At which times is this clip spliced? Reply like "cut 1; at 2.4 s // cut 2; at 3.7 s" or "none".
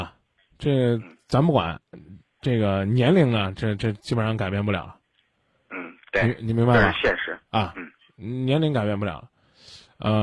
none